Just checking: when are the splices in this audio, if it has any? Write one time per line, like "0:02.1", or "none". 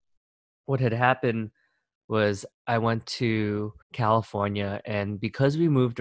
0:02.5
0:03.8